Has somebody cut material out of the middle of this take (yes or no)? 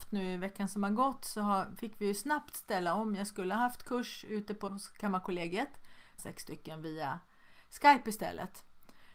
yes